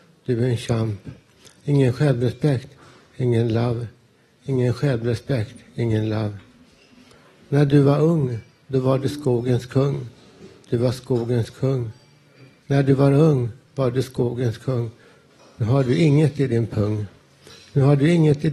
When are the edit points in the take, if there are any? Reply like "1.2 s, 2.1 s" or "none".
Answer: 12.6 s